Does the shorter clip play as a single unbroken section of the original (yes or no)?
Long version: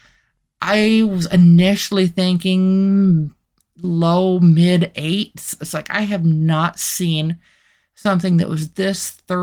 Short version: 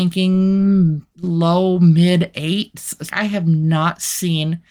no